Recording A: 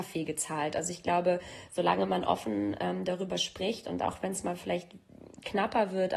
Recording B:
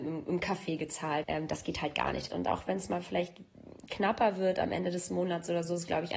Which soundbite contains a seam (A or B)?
B